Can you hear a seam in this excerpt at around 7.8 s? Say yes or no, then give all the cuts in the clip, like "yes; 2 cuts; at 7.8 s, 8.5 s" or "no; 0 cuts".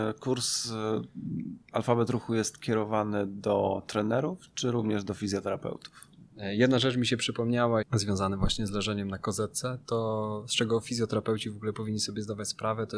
yes; 2 cuts; at 6.3 s, 7.8 s